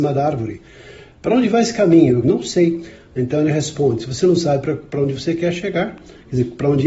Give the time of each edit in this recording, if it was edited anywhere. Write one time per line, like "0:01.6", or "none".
0:02.2